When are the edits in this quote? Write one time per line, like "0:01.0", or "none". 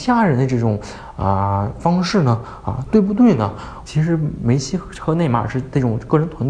0:03.9